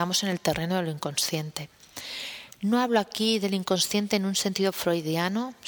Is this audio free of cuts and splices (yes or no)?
yes